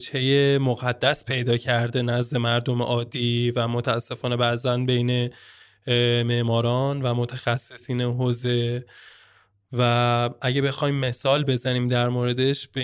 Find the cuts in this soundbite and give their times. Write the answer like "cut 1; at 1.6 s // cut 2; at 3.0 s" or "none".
none